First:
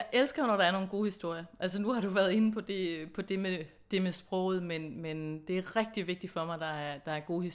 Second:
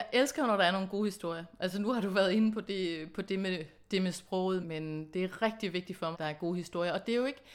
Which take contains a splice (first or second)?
second